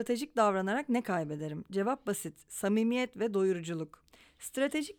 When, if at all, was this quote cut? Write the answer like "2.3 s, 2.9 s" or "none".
none